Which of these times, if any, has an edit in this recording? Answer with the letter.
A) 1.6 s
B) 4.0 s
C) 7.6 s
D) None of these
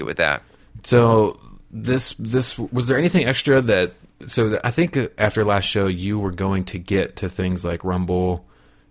D